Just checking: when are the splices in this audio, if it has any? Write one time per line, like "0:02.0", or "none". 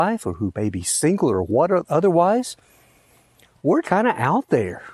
0:03.8